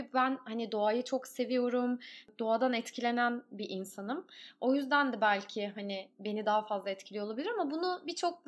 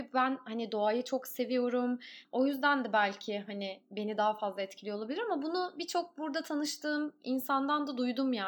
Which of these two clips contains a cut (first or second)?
second